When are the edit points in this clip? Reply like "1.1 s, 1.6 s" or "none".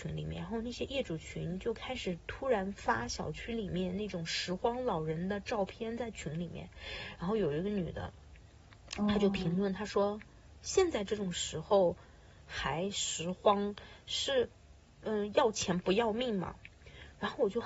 none